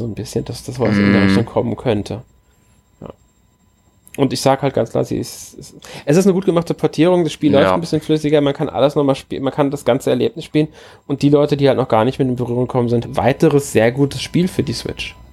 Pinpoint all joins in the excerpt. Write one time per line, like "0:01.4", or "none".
0:13.0

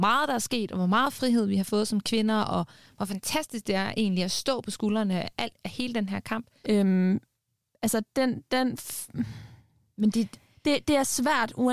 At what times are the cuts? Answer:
0:06.6

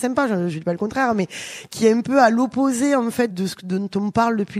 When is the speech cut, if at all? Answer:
0:03.3

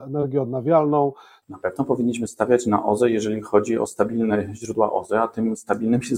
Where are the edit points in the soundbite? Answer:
0:01.4

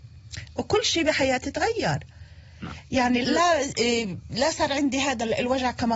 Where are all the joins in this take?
0:03.2

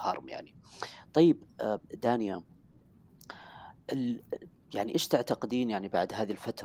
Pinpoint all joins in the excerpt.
0:04.9

